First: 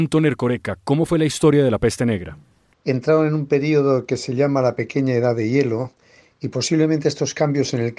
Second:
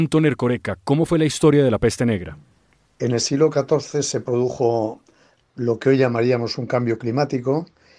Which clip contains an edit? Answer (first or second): first